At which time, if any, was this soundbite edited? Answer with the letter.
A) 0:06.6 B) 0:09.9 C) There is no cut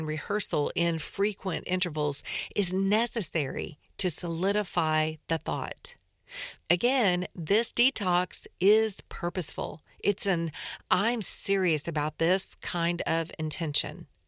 A